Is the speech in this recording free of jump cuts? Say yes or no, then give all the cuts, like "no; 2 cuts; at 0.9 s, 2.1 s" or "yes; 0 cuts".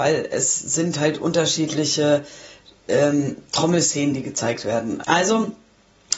no; 1 cut; at 5.0 s